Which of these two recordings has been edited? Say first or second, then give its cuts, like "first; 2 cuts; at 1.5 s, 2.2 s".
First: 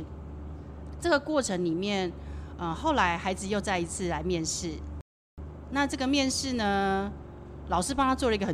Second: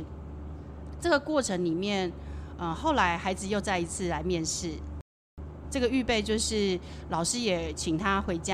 second; 1 cut; at 5.6 s